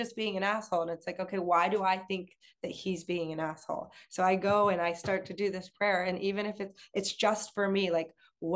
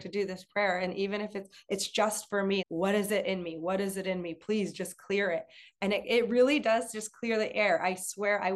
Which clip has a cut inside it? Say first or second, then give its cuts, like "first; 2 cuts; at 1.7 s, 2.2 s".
second; 1 cut; at 2.6 s